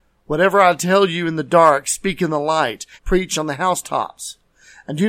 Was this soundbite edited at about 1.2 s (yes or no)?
no